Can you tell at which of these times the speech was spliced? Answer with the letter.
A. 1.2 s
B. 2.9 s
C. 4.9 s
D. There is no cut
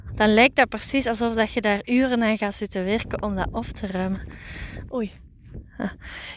C